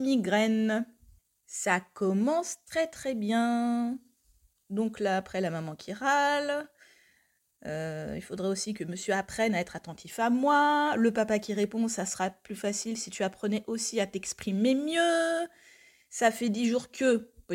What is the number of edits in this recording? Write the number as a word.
zero